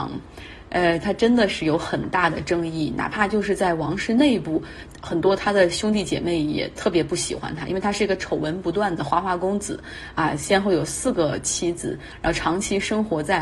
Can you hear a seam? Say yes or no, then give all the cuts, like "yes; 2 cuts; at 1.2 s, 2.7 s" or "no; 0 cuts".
no; 0 cuts